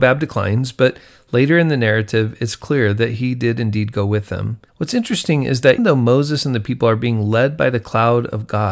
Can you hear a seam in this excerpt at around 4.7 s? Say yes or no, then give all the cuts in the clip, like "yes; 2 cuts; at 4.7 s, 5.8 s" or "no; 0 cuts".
yes; 2 cuts; at 4.7 s, 5.8 s